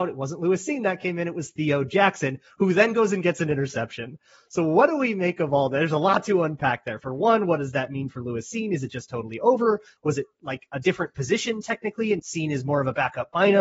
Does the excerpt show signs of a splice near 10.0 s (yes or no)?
no